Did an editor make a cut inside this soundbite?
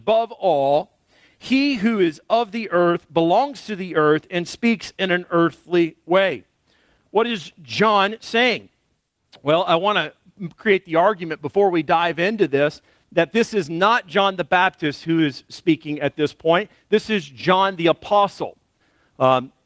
no; 0 cuts

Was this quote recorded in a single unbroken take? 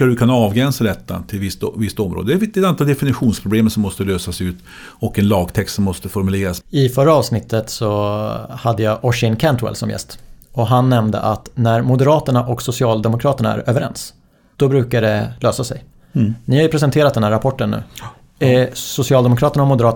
no; 1 cut; at 6.6 s

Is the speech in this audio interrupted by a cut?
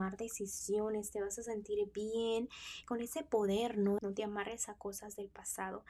yes; 2 cuts; at 2.8 s, 4.0 s

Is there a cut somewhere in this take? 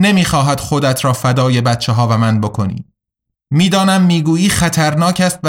yes; 1 cut; at 3.3 s

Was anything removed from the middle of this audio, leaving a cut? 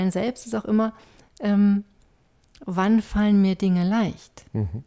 no; 0 cuts

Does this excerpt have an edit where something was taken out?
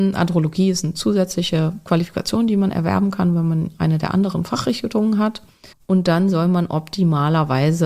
yes; 1 cut; at 5.7 s

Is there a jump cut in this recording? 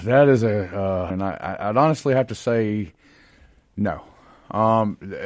yes; 1 cut; at 1.1 s

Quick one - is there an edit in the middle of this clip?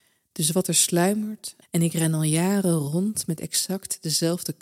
yes; 1 cut; at 1.6 s

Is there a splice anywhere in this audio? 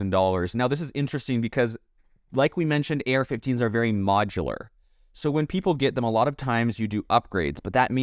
no; 0 cuts

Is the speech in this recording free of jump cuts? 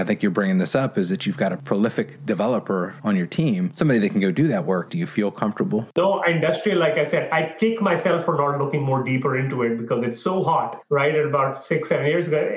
no; 1 cut; at 4.9 s

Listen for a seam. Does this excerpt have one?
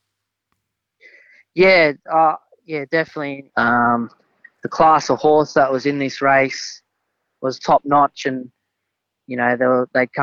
yes; 1 cut; at 3.5 s

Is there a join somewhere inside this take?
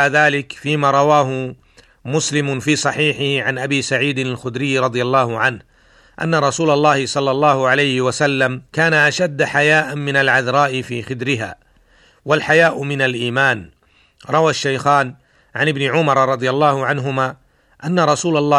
yes; 1 cut; at 8.7 s

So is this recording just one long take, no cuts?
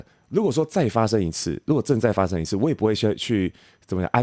yes; 0 cuts

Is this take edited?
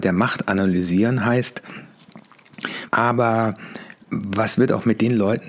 yes; 2 cuts; at 2.9 s, 4.1 s

